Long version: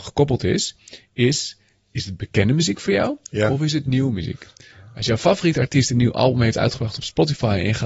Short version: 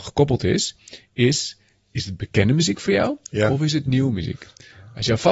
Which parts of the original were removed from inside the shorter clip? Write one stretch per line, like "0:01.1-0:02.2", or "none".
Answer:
none